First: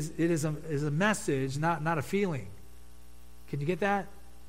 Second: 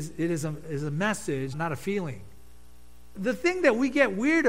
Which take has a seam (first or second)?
second